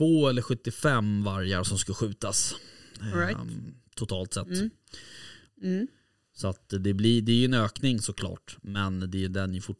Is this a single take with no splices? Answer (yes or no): no